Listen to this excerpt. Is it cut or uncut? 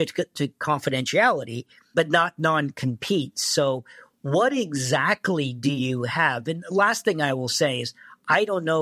uncut